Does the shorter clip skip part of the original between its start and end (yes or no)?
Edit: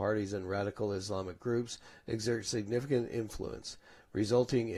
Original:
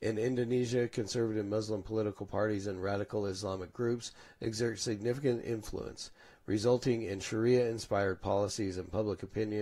no